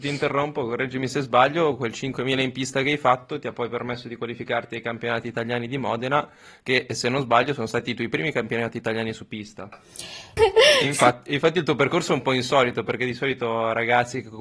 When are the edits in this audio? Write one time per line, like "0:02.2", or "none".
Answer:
0:10.4